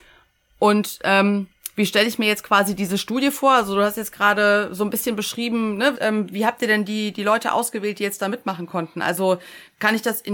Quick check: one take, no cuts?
no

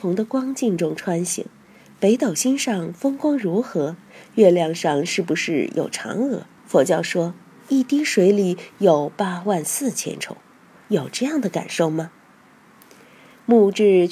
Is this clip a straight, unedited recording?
no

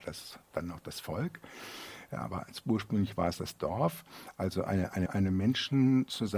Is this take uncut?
no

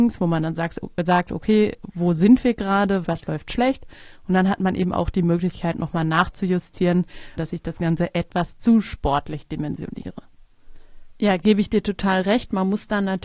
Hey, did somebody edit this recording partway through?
yes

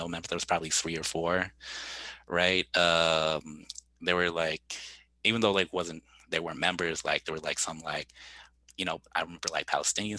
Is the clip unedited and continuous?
yes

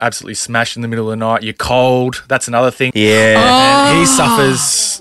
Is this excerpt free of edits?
no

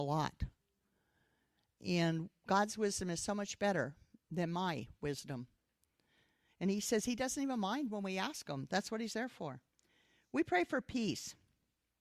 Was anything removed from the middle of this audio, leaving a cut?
no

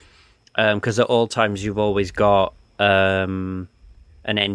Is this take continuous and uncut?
yes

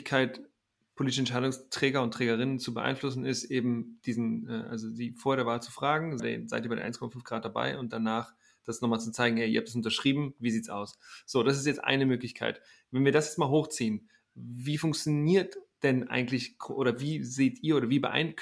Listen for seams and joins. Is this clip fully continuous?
no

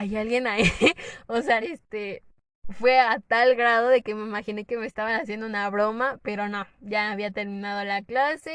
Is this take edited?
yes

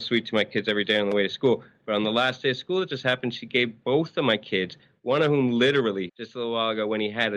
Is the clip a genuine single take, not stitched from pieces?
no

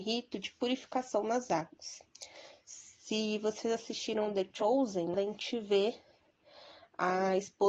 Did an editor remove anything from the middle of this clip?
yes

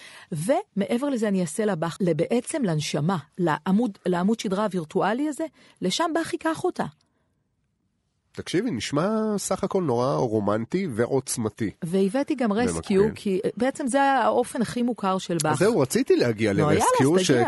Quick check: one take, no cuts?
no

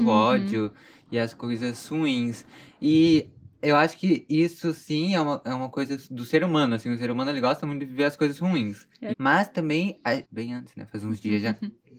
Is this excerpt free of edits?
no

